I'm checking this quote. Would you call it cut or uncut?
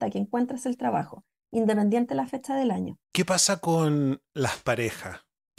cut